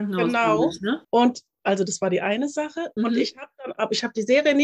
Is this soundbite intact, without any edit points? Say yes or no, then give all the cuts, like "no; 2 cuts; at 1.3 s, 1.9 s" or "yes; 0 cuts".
no; 2 cuts; at 1.0 s, 3.0 s